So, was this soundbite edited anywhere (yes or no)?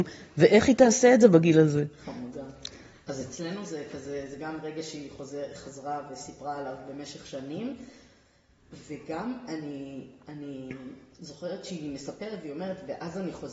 no